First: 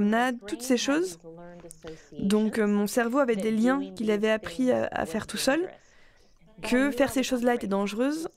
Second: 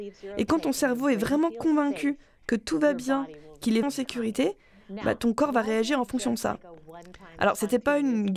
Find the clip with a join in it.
second; 1 cut; at 3.8 s

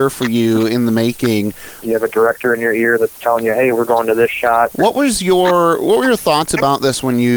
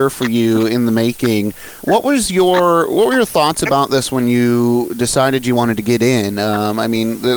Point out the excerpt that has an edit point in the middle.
first; 2 cuts; at 1.8 s, 4.7 s

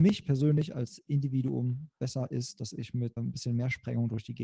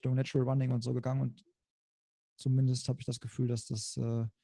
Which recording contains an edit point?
first; 1 cut; at 3.2 s

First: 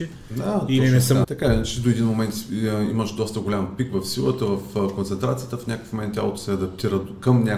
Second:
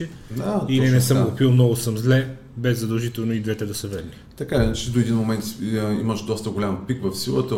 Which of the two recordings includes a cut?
first; 1 cut; at 1.2 s

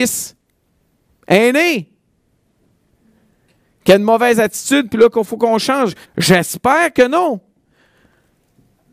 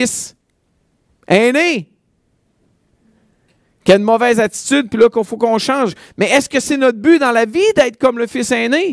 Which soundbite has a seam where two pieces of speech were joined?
first; 1 cut; at 6.0 s

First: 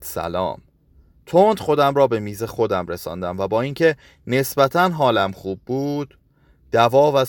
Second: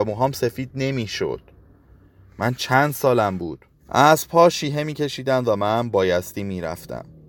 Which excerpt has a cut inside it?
second; 1 cut; at 3.8 s

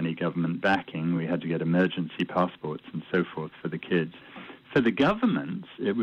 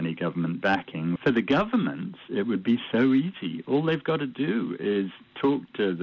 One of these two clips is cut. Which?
second; 1 cut; at 1.2 s

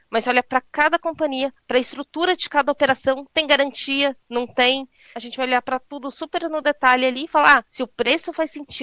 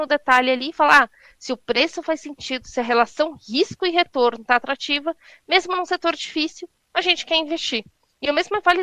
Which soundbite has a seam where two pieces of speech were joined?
first; 2 cuts; at 5.1 s, 7.6 s

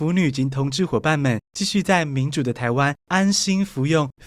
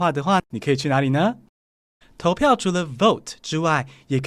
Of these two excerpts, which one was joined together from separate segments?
second; 1 cut; at 2.0 s

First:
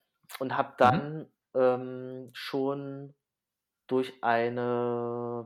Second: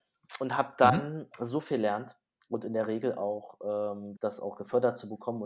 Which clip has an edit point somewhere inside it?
second; 2 cuts; at 1.3 s, 4.2 s

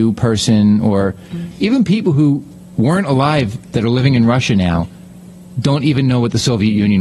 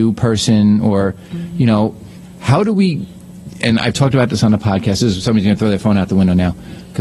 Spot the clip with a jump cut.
first; 1 cut; at 1.5 s

